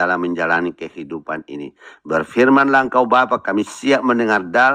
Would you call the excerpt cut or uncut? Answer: uncut